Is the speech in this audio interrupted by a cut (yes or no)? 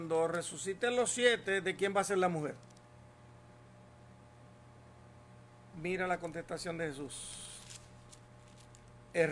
yes